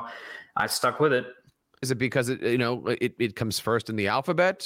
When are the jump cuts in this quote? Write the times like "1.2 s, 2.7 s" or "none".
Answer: 1.8 s